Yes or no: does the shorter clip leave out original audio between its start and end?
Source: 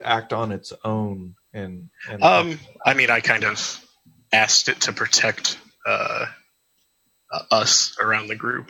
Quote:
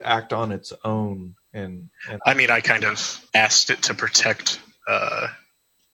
yes